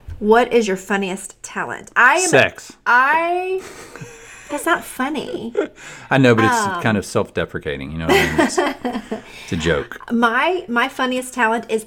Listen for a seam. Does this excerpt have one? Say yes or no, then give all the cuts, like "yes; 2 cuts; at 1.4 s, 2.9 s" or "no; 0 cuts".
no; 0 cuts